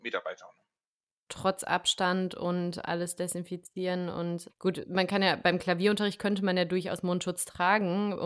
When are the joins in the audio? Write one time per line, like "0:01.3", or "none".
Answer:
0:01.3
0:04.5